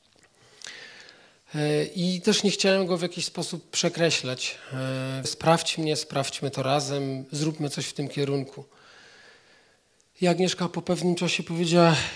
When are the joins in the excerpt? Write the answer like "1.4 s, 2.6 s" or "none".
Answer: 5.2 s